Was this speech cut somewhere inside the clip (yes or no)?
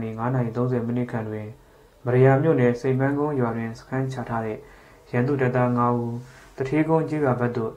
no